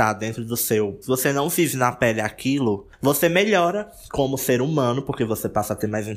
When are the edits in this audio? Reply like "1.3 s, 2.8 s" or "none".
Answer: none